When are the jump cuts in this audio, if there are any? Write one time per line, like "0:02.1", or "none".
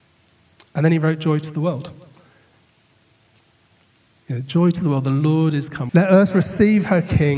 0:05.9